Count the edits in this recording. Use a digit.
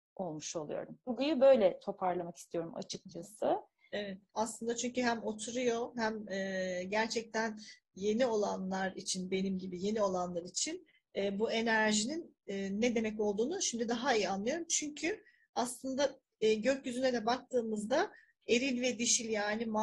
2